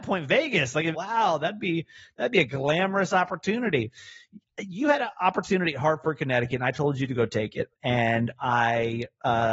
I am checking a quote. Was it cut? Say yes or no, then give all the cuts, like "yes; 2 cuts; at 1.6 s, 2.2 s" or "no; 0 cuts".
yes; 1 cut; at 0.9 s